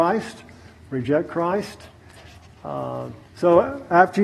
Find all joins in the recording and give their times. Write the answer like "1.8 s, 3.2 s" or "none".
3.2 s